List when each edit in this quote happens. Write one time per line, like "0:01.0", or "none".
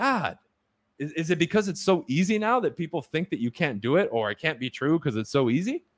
0:00.9